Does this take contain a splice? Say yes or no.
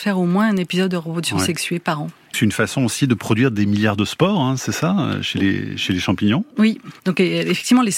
yes